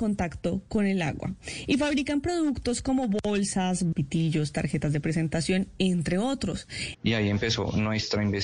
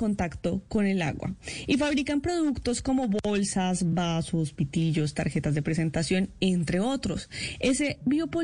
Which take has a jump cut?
first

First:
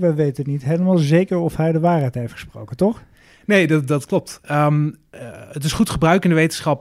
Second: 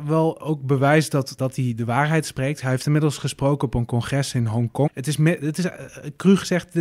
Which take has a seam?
second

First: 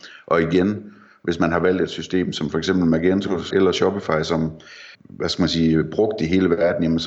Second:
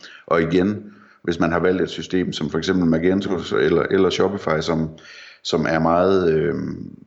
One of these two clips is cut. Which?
first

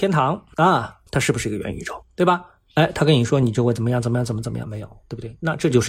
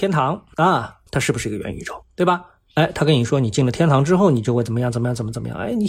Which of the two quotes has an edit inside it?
first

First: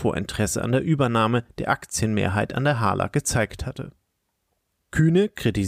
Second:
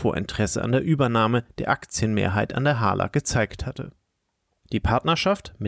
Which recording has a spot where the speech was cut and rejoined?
second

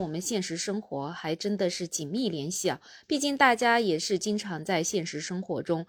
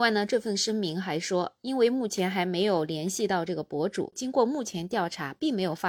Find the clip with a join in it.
second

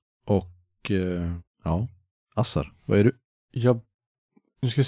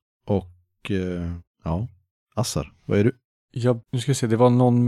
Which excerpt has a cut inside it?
second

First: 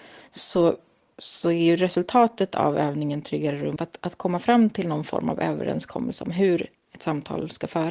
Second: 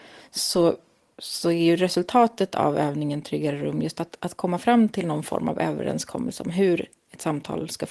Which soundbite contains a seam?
first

